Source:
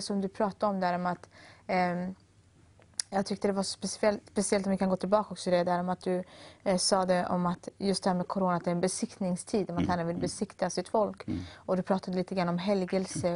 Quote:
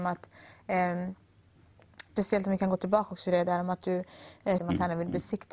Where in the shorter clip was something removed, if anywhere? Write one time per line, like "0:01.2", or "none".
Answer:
0:02.1
0:04.6

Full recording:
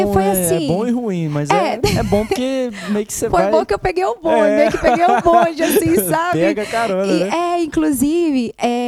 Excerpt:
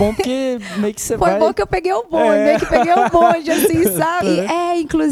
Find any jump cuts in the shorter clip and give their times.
0:04.2

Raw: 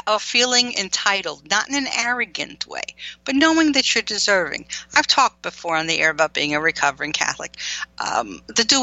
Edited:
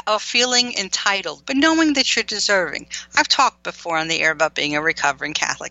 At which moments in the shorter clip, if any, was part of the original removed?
0:01.4

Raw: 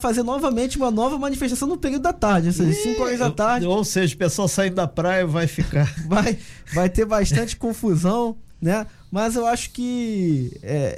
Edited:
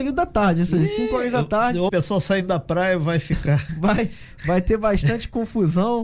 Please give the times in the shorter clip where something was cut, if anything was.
0:01.9

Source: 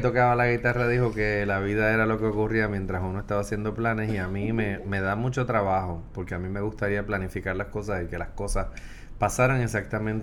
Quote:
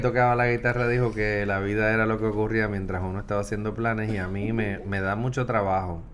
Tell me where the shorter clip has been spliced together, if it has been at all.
none

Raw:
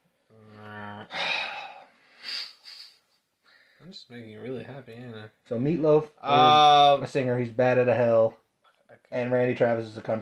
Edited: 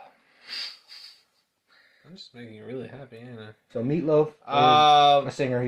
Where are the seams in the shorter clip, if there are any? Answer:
none

